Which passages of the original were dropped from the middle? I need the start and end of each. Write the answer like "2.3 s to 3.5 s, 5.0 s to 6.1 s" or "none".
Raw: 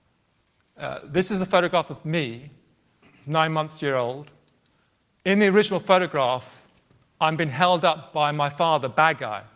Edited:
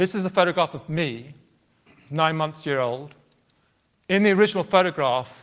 none